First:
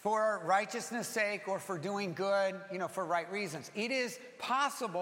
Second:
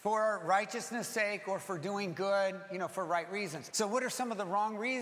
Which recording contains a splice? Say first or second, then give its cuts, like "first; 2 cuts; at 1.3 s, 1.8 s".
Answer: second; 1 cut; at 3.7 s